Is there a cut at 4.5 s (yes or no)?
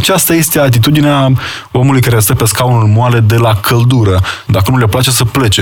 yes